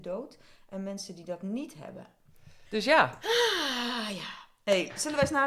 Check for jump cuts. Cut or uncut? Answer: cut